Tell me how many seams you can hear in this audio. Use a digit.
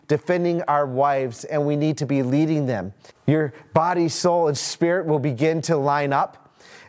1